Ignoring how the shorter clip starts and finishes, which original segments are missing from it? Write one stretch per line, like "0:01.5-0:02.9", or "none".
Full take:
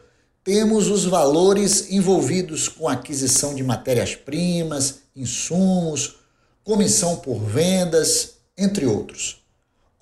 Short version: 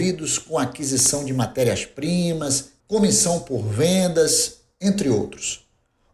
0:05.1-0:06.6